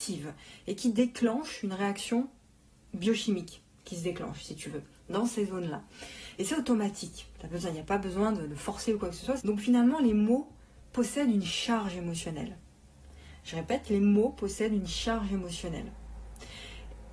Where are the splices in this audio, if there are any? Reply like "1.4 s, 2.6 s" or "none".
9.4 s

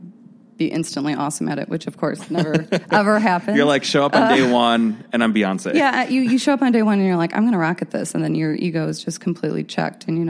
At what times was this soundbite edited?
none

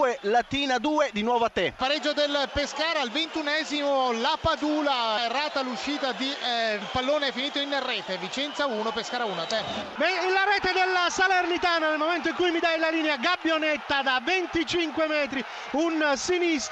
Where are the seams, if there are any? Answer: 5.2 s, 6.8 s

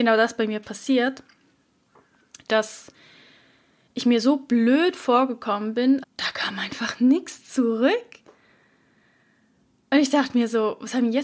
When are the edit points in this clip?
6.0 s

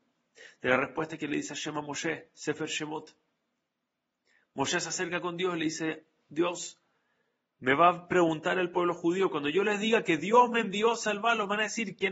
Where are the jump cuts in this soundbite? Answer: none

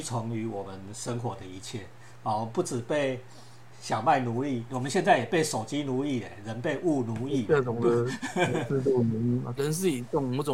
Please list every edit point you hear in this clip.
4.7 s, 9.6 s

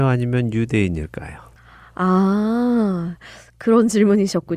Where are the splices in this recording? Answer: none

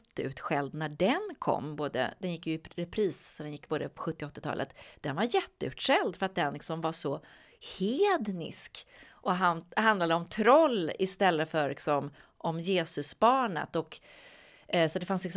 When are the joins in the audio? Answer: none

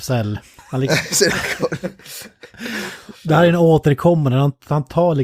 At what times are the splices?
none

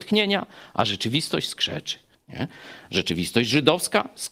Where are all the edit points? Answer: none

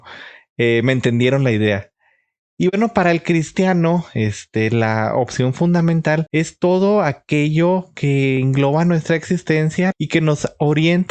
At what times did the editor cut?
6.3 s, 9.9 s

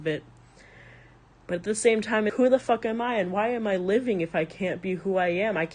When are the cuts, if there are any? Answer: 2.3 s

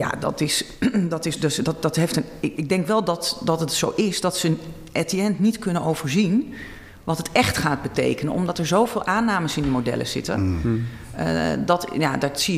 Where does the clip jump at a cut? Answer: 1.4 s, 2.6 s

